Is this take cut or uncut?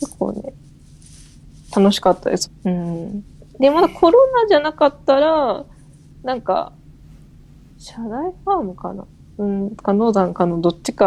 cut